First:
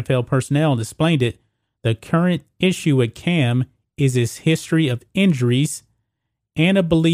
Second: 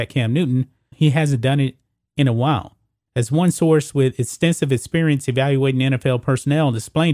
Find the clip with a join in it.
second; 2 cuts; at 0.9 s, 3.1 s

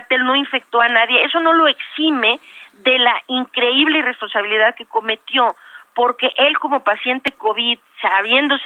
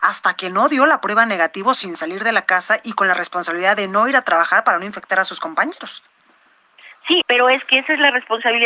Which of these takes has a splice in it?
second; 1 cut; at 7.2 s

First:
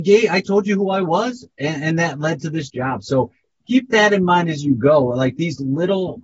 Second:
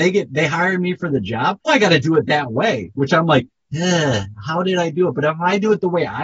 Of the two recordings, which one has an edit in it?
second; 1 cut; at 1.7 s

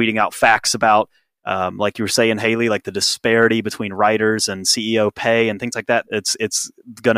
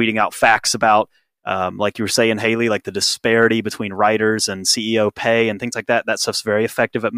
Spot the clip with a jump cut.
first; 1 cut; at 6.0 s

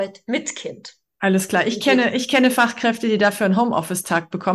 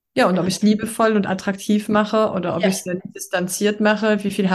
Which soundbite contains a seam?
second; 1 cut; at 3.0 s

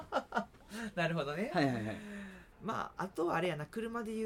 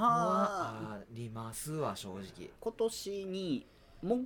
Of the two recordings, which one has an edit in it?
second; 1 cut; at 2.6 s

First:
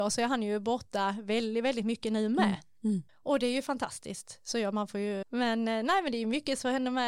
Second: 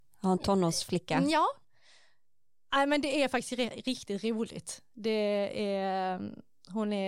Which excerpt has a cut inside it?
first; 2 cuts; at 3.1 s, 5.2 s

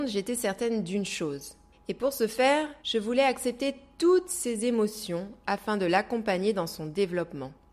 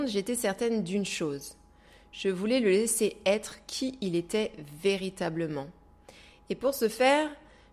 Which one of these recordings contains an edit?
first; 2 cuts; at 1.7 s, 2.8 s

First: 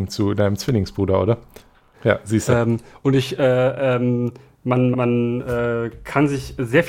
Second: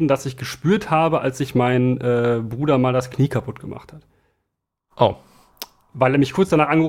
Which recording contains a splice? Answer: first; 2 cuts; at 1.9 s, 4.9 s

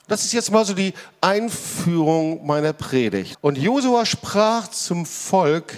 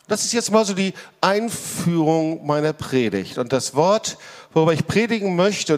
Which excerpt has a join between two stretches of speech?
first; 1 cut; at 3.3 s

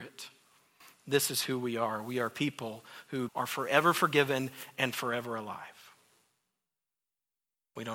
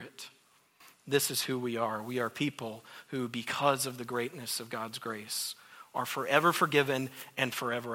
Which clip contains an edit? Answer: first; 1 cut; at 3.3 s

